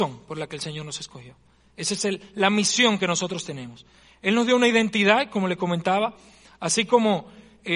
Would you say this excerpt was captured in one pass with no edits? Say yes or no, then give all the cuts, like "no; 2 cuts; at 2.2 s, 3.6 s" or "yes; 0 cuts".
yes; 0 cuts